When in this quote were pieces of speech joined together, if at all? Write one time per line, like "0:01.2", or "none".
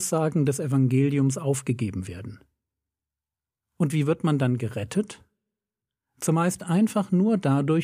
none